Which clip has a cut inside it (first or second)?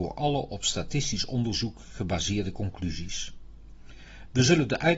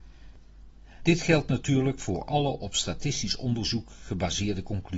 second